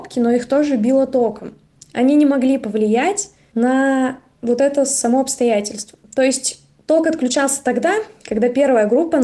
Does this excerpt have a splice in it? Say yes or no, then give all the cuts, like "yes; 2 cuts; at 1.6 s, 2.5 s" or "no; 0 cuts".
no; 0 cuts